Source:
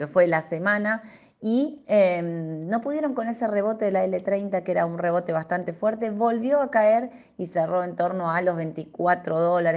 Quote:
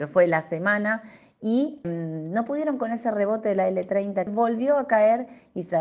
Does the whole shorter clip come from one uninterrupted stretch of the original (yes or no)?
no